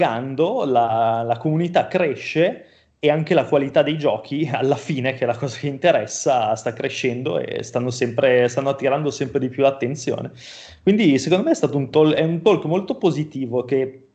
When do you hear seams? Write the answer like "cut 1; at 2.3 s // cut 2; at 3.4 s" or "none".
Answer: none